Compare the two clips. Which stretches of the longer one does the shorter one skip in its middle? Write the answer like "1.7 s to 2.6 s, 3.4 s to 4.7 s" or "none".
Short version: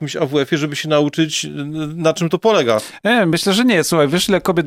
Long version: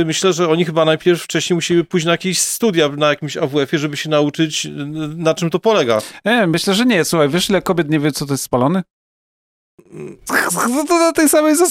none